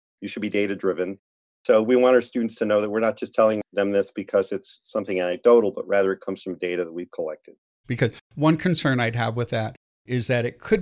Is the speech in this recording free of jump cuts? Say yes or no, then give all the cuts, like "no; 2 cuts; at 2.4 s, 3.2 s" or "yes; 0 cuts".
no; 1 cut; at 7.8 s